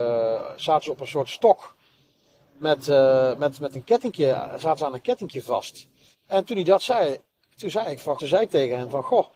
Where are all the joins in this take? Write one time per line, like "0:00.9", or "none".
0:06.1
0:08.2